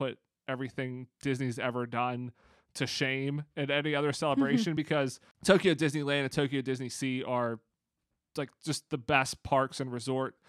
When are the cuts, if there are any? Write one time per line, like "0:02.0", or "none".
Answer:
none